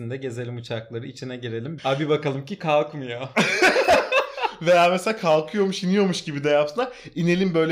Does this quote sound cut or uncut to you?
cut